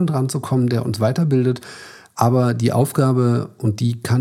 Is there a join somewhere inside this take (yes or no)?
no